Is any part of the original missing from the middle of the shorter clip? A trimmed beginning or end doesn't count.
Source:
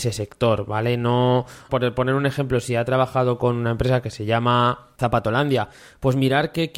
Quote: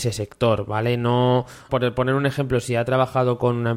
no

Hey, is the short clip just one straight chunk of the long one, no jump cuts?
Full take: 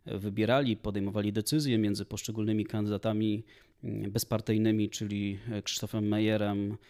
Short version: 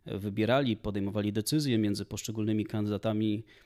yes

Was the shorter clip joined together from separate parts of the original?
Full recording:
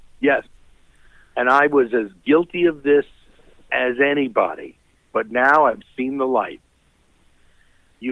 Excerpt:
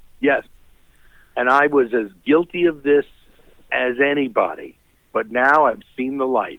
no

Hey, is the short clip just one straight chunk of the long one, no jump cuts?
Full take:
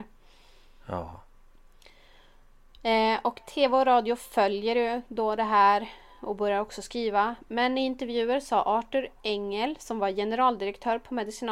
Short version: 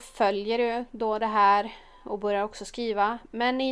yes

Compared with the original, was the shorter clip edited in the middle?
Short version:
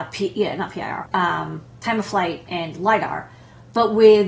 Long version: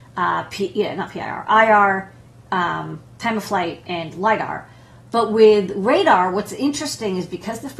yes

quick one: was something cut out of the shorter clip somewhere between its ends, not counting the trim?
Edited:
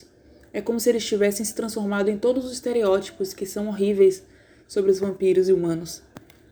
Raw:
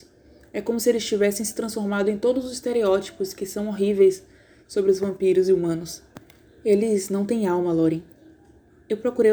no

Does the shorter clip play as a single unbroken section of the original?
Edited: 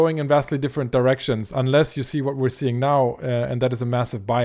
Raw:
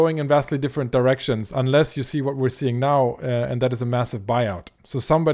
yes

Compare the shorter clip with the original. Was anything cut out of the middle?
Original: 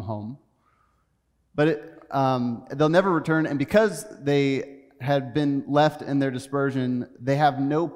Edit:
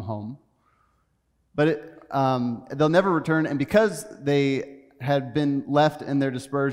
no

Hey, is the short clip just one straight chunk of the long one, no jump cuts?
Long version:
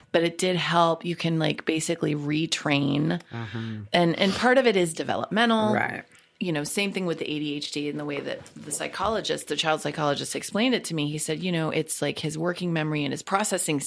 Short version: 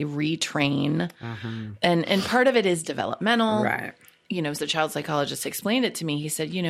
no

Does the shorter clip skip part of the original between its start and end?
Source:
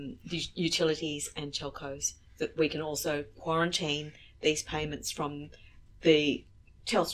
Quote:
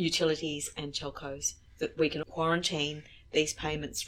yes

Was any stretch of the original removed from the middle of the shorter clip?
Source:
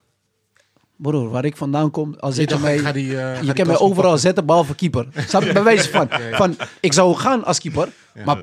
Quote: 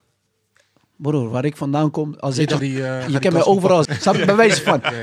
yes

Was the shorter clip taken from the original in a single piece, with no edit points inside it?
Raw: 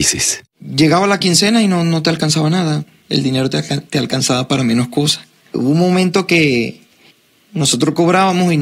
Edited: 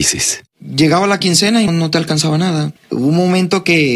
no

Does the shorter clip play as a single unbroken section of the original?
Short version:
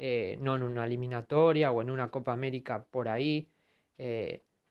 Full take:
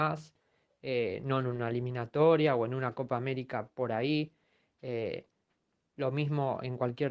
yes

